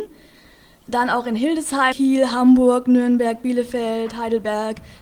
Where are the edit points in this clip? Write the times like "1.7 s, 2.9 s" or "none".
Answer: 1.9 s